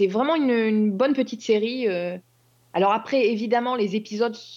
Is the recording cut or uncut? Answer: uncut